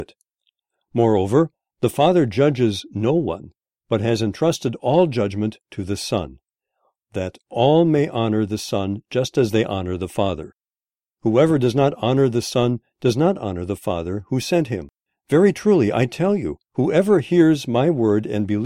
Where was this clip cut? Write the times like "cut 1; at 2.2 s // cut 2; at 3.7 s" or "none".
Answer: none